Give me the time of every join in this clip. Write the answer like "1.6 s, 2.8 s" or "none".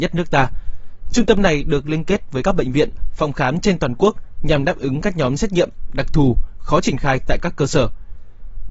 none